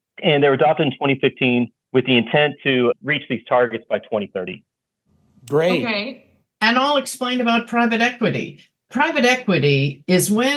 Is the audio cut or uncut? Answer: uncut